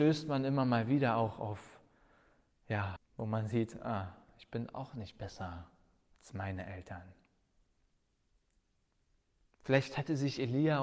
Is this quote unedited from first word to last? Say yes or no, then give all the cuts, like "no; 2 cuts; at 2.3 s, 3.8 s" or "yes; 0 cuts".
no; 1 cut; at 3.0 s